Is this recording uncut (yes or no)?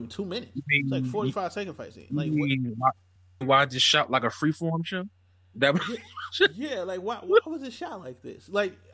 yes